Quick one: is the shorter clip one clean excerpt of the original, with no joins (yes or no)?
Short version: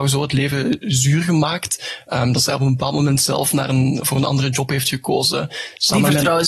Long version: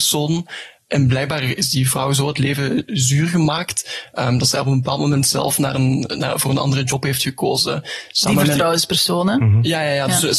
no